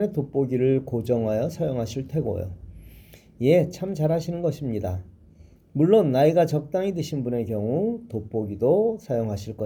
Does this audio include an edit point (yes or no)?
yes